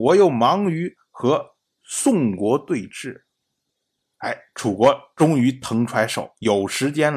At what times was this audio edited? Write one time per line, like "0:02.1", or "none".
0:04.1